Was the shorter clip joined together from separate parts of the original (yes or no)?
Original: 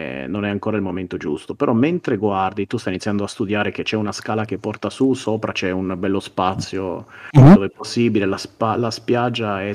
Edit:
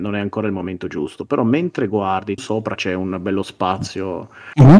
yes